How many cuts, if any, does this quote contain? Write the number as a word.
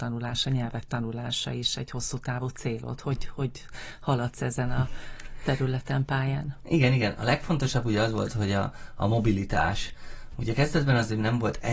zero